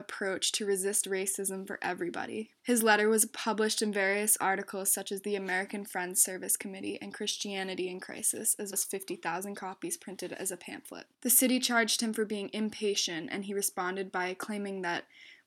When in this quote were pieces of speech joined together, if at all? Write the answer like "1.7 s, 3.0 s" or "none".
2.6 s, 8.7 s, 11.1 s